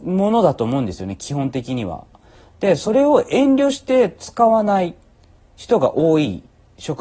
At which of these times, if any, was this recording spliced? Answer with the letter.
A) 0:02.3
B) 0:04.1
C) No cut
C